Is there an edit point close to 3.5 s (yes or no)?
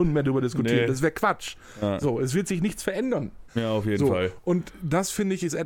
yes